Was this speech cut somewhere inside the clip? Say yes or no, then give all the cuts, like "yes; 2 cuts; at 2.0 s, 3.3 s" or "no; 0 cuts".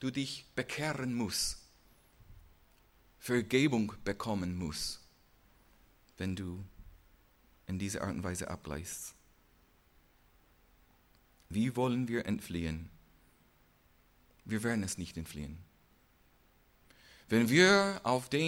no; 0 cuts